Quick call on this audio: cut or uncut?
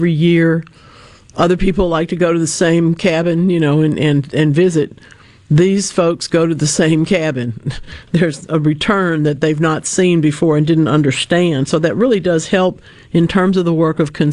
uncut